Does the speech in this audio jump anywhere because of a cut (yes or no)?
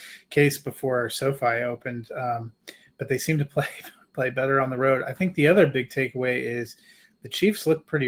no